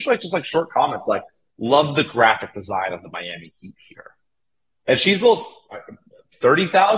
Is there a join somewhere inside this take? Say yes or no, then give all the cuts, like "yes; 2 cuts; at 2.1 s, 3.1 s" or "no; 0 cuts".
no; 0 cuts